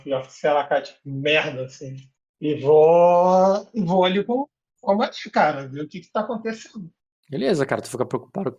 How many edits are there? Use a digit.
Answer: 0